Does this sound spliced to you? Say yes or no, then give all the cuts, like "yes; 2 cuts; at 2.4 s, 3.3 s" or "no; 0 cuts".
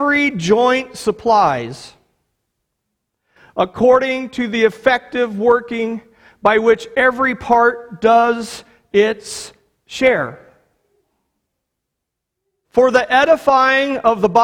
yes; 1 cut; at 12.6 s